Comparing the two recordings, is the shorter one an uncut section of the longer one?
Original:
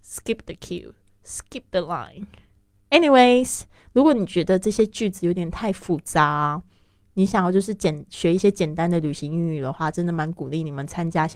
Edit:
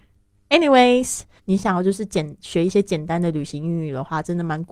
no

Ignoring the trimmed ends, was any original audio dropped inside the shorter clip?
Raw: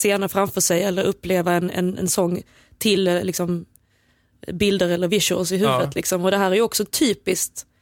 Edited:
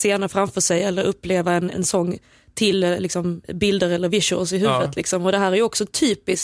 yes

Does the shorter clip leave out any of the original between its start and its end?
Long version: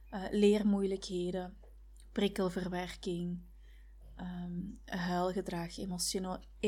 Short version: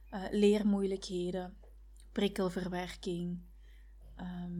no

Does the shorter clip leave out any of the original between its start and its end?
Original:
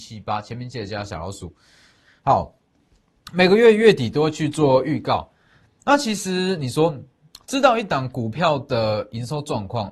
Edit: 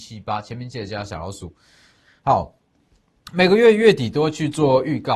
no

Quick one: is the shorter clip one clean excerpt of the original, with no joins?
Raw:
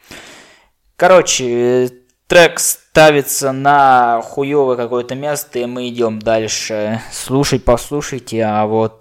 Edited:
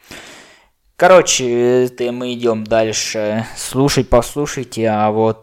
no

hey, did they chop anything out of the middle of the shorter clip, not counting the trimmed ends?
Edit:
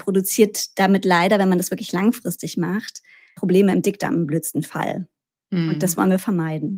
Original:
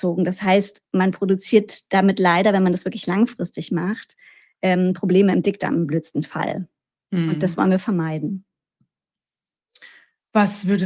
yes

